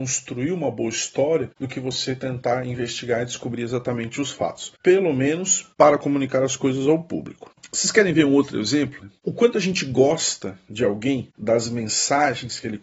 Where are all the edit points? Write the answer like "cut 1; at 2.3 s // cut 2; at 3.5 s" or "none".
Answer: cut 1; at 9.0 s